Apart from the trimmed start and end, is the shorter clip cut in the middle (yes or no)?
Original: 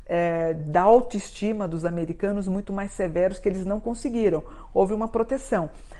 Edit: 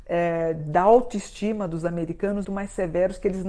yes